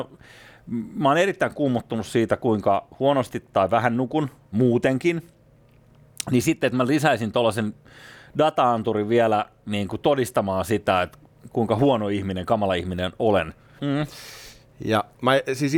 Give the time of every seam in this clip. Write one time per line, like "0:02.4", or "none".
0:13.8